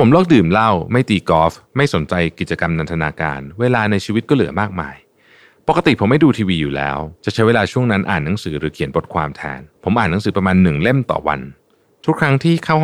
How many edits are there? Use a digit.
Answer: 2